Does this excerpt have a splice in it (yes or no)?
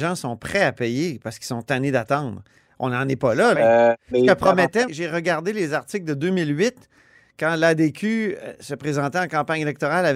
yes